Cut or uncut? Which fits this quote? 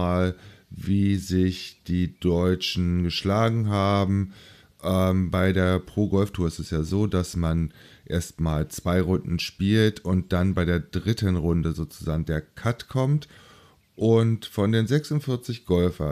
uncut